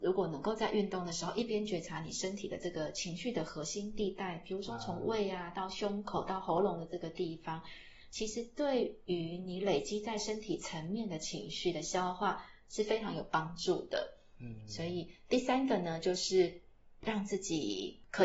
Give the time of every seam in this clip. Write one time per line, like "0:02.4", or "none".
none